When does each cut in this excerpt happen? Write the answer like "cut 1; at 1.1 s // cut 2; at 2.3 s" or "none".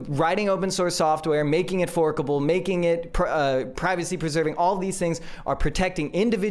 none